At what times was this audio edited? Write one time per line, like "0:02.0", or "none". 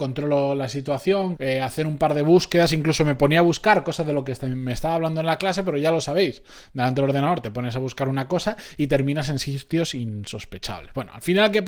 0:01.4